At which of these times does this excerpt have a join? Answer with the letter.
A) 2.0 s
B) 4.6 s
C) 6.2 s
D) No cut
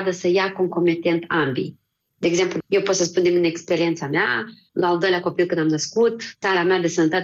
D